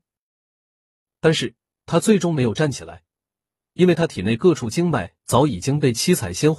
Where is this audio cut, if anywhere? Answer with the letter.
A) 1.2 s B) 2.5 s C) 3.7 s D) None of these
D